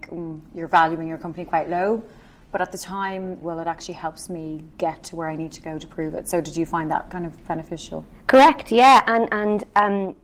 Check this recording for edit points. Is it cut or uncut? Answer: cut